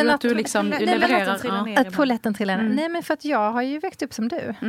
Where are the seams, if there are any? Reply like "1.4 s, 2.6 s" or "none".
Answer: none